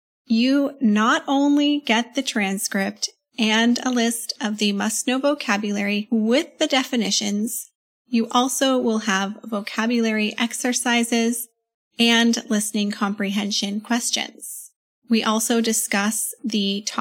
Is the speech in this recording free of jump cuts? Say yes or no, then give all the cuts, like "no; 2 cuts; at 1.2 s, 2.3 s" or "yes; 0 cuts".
yes; 0 cuts